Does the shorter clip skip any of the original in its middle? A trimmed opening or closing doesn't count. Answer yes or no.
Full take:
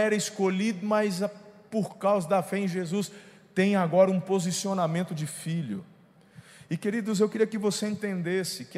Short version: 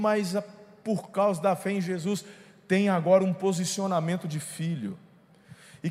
no